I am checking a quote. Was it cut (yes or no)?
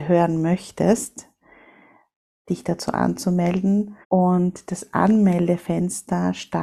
yes